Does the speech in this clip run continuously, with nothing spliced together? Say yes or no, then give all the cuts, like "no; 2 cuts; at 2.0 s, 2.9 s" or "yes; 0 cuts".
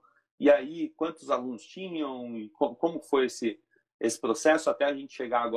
yes; 0 cuts